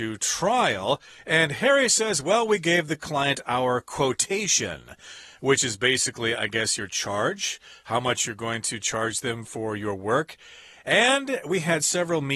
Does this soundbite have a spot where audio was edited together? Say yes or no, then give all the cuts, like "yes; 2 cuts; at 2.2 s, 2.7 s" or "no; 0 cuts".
no; 0 cuts